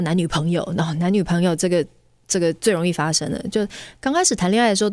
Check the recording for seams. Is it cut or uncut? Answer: uncut